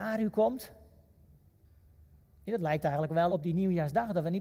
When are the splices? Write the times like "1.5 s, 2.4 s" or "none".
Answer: 3.3 s